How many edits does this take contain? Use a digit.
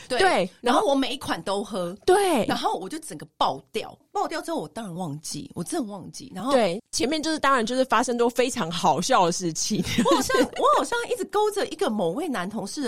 0